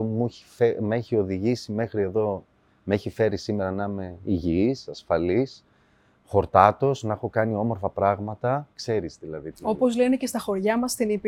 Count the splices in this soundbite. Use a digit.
1